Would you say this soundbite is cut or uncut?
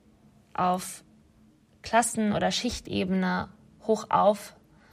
uncut